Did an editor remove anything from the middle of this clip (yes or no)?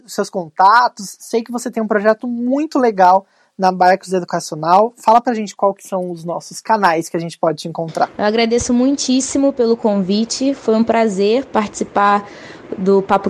no